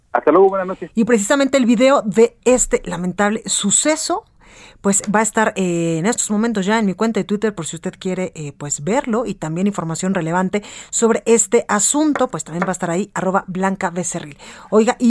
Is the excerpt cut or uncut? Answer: uncut